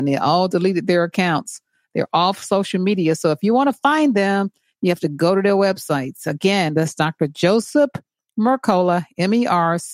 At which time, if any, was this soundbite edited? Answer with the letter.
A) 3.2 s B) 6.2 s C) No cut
C